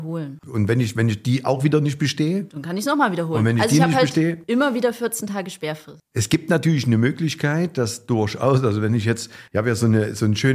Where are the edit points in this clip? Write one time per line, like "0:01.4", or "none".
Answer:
none